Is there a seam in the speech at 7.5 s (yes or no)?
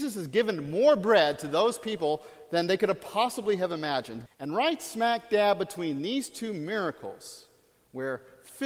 no